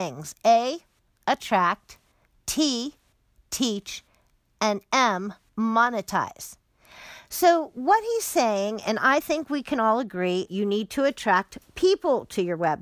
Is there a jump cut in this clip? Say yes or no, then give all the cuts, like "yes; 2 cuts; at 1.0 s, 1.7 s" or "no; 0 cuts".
yes; 1 cut; at 10.5 s